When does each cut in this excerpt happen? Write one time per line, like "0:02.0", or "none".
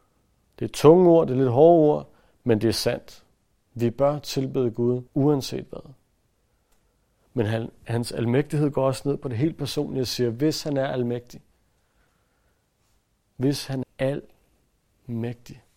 0:05.1
0:13.8